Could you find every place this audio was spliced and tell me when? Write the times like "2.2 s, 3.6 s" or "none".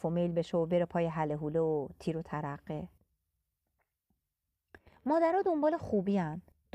none